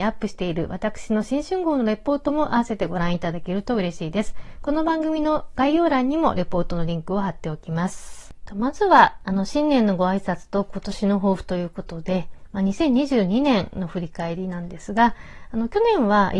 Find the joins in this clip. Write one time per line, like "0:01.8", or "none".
none

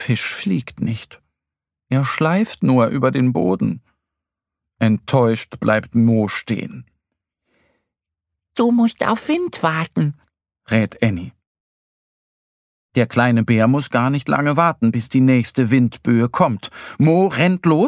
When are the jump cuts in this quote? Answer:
none

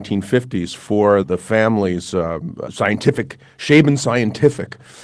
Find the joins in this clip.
0:01.2
0:02.7

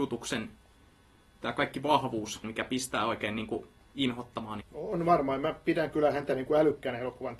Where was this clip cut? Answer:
0:02.4
0:04.6

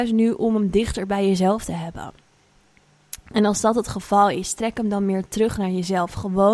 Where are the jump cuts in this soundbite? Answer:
none

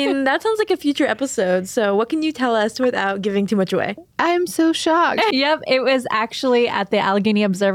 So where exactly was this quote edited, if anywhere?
0:04.0
0:05.3

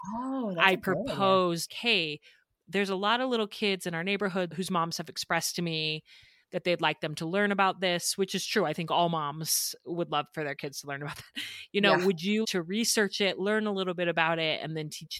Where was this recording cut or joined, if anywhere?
0:01.7
0:12.4

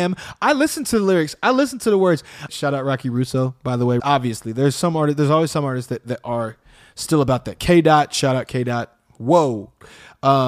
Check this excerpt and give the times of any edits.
0:02.5
0:04.0

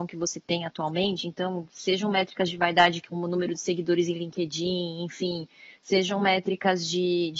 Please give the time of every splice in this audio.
none

